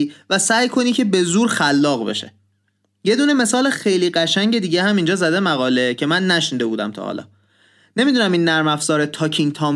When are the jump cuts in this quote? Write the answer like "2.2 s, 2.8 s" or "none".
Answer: none

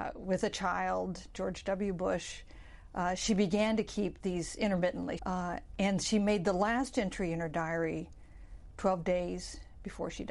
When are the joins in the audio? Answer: 5.2 s

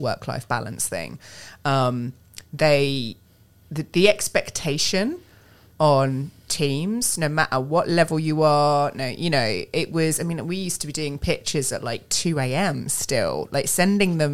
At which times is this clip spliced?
none

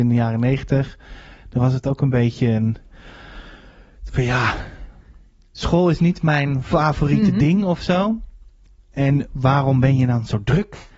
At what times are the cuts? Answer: none

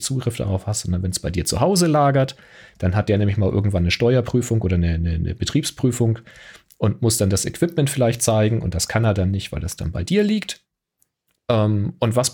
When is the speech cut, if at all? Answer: none

